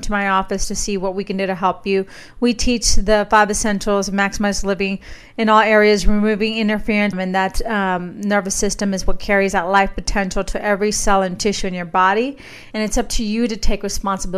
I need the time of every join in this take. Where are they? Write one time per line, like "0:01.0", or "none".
0:07.1
0:12.7